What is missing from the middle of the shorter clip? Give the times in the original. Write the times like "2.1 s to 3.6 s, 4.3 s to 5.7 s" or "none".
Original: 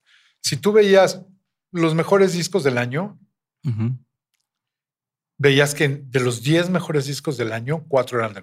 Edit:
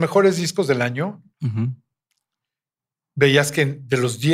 3.3 s to 3.5 s